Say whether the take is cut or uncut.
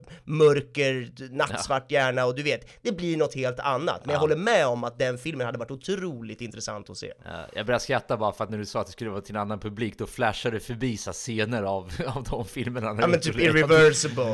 uncut